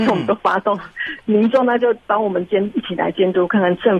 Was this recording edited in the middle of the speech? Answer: no; 0 cuts

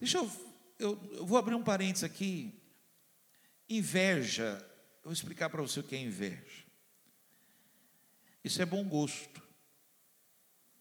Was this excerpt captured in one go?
no; 1 cut; at 8.4 s

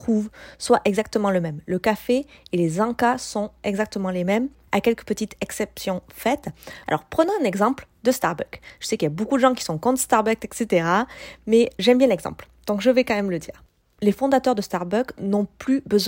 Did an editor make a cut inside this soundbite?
yes; 2 cuts; at 6.8 s, 11.8 s

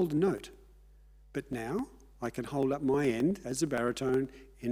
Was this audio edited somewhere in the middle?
no; 0 cuts

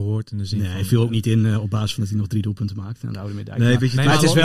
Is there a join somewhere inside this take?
no; 0 cuts

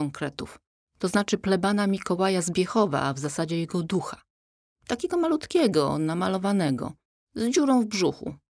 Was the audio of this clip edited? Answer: no; 0 cuts

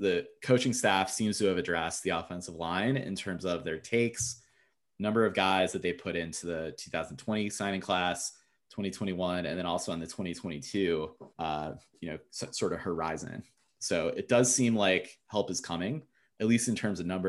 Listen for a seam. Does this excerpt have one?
yes; 1 cut; at 11.3 s

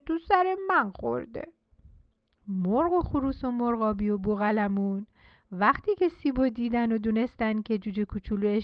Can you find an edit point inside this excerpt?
no; 0 cuts

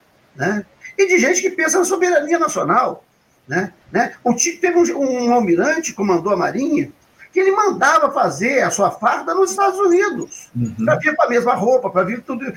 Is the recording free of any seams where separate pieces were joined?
no; 1 cut; at 3.8 s

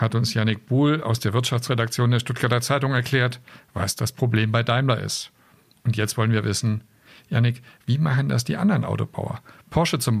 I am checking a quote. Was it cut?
no; 0 cuts

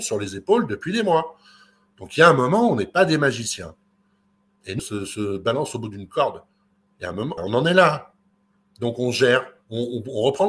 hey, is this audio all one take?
no; 2 cuts; at 4.8 s, 7.4 s

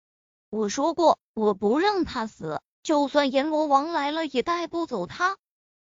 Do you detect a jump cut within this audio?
no; 0 cuts

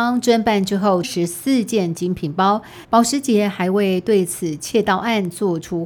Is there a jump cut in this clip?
yes; 2 cuts; at 1.0 s, 2.8 s

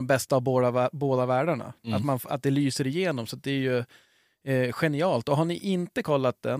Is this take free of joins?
yes; 0 cuts

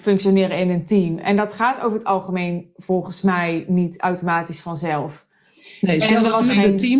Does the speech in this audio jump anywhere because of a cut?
no; 0 cuts

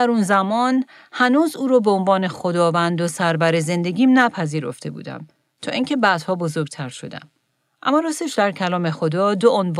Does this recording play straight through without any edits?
yes; 0 cuts

